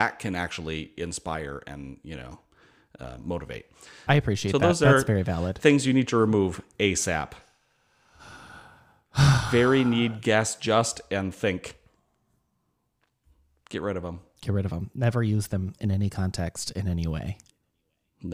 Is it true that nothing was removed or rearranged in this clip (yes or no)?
no